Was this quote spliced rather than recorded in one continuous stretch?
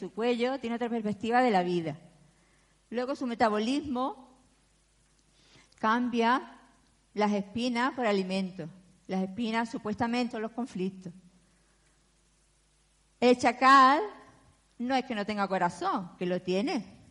yes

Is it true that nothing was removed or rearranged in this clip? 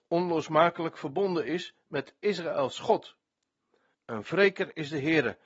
no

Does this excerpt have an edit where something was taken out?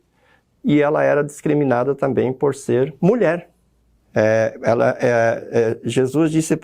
yes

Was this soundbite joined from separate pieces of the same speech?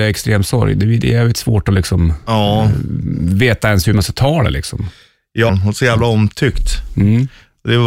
yes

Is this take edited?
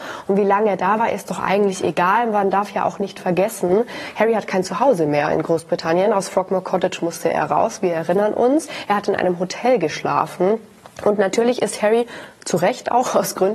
no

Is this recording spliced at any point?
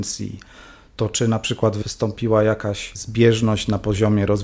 no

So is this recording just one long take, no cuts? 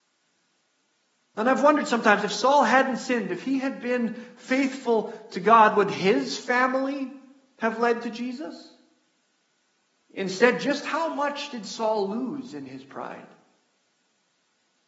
no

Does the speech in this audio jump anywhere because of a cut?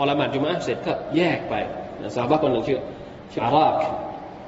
yes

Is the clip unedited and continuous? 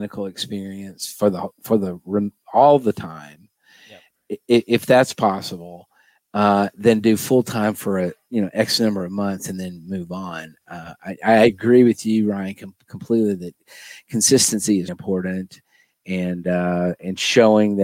no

